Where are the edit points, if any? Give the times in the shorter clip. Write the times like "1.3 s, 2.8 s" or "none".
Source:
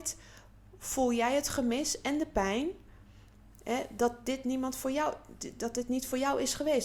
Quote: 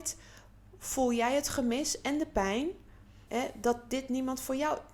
3.3 s